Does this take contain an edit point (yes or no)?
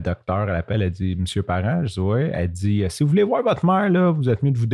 no